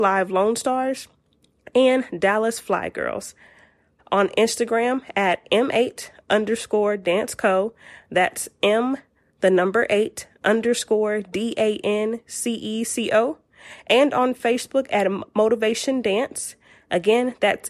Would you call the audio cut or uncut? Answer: cut